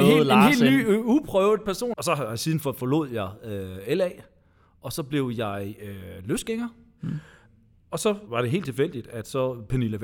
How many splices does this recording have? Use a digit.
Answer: 1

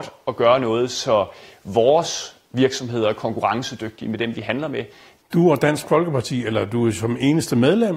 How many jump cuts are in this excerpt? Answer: 1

